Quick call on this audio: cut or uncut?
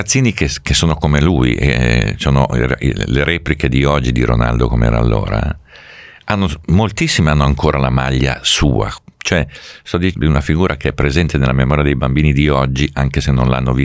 cut